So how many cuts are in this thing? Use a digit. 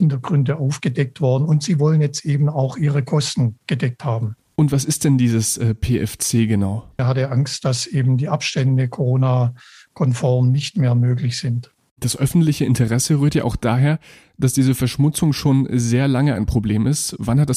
1